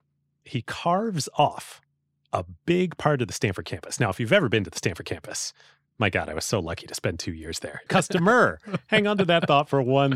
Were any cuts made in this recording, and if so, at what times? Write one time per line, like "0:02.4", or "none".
0:07.9